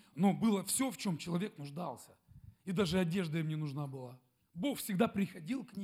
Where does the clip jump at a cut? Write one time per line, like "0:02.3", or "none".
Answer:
0:04.4